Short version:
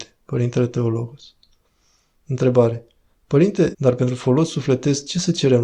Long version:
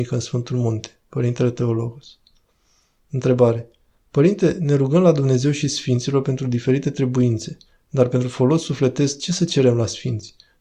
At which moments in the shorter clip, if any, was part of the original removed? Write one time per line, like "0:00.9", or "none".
0:03.7